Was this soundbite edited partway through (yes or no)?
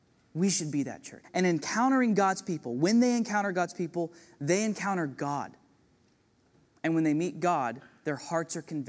yes